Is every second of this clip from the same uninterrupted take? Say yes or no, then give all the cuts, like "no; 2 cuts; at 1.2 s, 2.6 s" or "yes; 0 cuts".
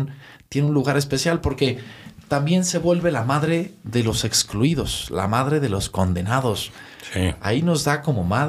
yes; 0 cuts